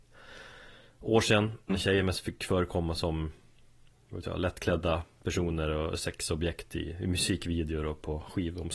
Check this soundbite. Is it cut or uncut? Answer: cut